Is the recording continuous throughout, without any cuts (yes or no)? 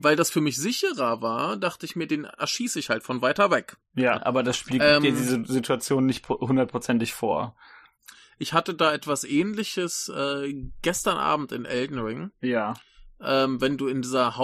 no